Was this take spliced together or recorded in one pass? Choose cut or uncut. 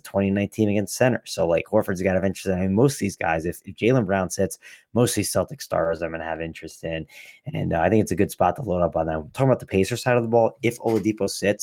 uncut